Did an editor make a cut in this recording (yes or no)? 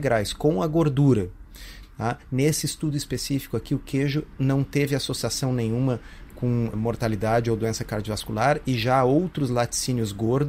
yes